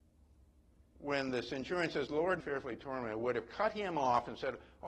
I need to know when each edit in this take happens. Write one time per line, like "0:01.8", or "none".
0:02.4